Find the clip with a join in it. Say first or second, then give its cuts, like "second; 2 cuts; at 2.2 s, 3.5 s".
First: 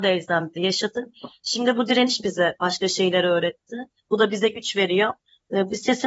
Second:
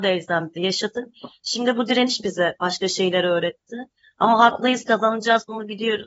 first; 1 cut; at 4.0 s